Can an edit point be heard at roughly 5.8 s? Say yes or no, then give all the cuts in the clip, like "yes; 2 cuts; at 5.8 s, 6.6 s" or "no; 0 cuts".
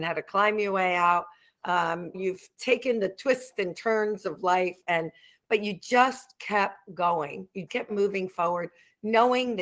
no; 2 cuts; at 2.1 s, 7.7 s